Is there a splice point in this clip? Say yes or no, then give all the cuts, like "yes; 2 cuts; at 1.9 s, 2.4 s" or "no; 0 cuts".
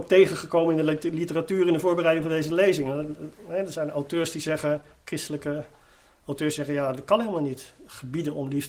no; 0 cuts